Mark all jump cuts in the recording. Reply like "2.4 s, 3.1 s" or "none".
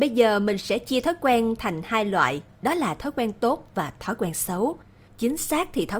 5.1 s